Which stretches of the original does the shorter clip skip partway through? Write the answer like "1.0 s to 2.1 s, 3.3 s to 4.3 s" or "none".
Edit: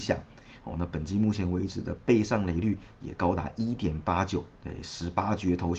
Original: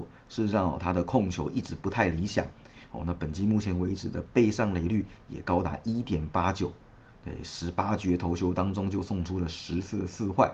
6.8 s to 7.2 s